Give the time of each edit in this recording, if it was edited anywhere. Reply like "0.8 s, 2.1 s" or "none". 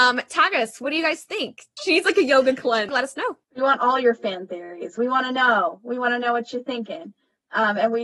1.8 s, 2.9 s